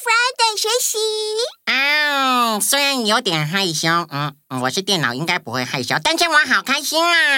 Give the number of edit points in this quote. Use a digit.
0